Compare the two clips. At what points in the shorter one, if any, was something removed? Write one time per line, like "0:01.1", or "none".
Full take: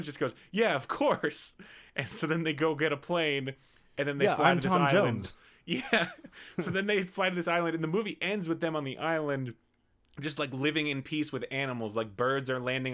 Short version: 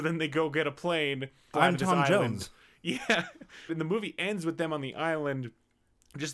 0:01.5
0:03.7